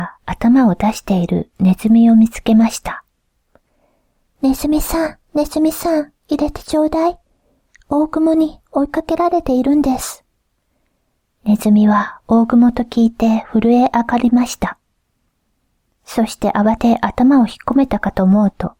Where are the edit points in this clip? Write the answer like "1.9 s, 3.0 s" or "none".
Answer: 16.8 s

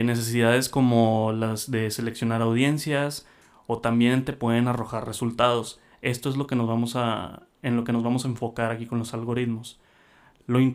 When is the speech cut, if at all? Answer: none

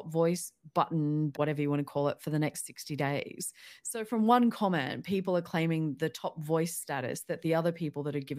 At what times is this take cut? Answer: 1.3 s

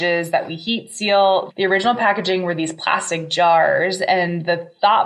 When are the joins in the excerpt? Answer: 1.5 s

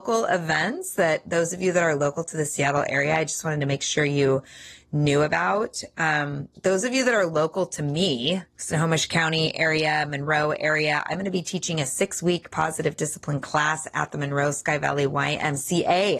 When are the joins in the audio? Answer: 6.5 s, 8.5 s

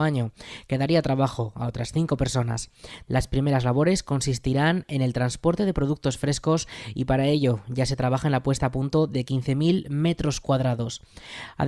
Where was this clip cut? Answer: 3.1 s

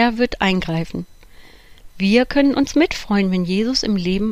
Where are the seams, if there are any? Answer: 1.9 s

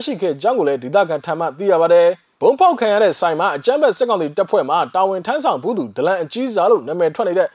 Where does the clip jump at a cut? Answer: 2.4 s

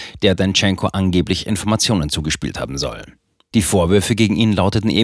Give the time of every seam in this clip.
3.5 s

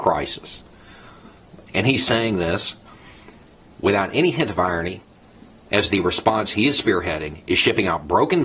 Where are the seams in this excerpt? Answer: 1.6 s

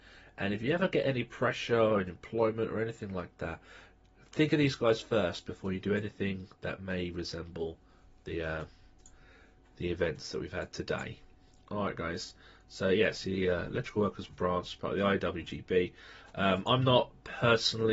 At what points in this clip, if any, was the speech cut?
none

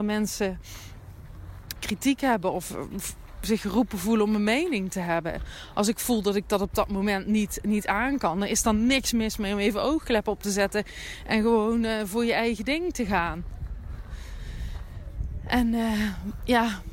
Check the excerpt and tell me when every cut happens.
1.8 s

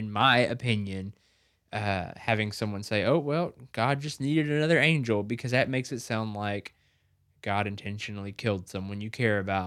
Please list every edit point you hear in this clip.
none

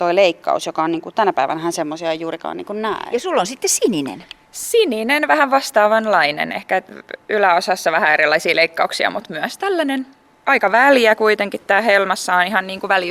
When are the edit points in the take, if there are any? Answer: none

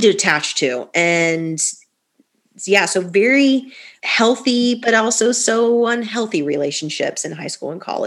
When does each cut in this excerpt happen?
4.0 s

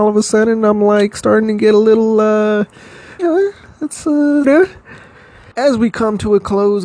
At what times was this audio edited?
3.2 s, 4.4 s

